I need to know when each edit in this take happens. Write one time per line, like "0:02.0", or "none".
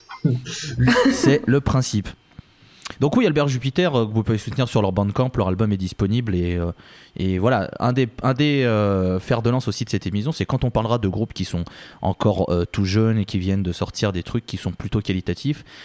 none